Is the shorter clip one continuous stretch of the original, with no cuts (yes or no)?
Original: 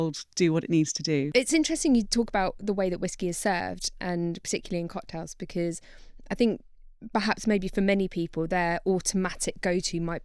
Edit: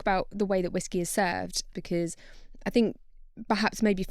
no